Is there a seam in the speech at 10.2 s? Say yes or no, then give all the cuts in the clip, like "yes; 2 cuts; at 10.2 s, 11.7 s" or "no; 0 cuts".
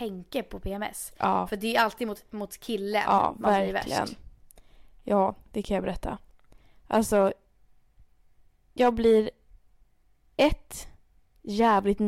no; 0 cuts